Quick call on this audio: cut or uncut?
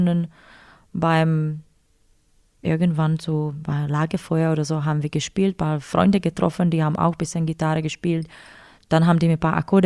uncut